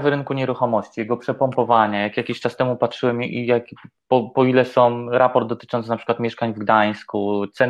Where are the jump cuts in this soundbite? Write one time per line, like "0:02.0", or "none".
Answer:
none

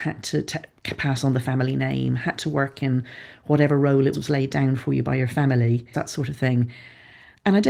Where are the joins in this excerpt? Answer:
0:04.1
0:05.9

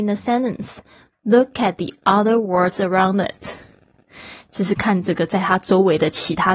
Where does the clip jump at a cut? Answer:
0:04.8

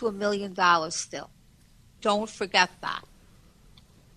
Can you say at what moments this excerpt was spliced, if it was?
0:02.0

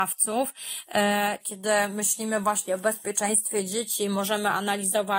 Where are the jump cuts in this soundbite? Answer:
0:01.4

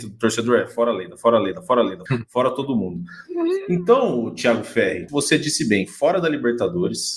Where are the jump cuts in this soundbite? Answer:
0:02.1
0:05.1

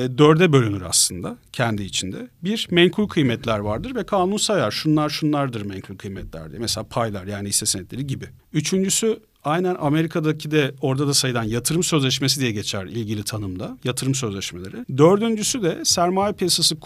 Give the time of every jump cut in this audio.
0:08.4

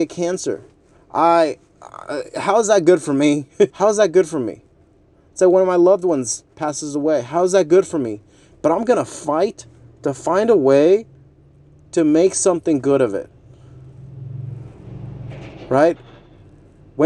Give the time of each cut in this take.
0:01.0
0:03.7
0:08.5

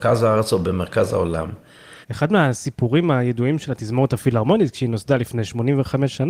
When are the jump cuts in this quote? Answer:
0:02.0

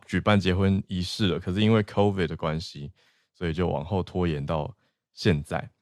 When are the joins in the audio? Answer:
none

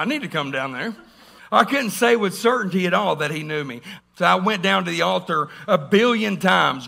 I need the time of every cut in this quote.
0:01.4
0:04.0

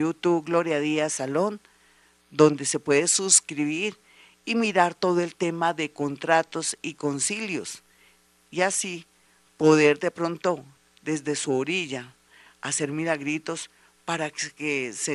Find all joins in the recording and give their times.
none

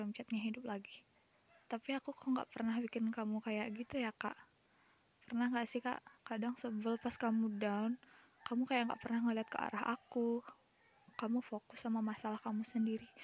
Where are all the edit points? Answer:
0:06.2

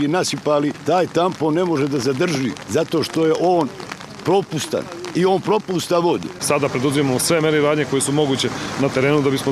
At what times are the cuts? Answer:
0:06.4

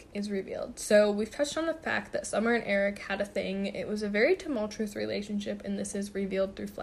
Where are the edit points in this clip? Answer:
none

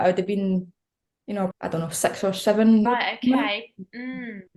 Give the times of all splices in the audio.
0:01.5
0:02.9

